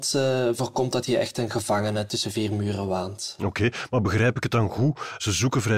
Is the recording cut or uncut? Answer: cut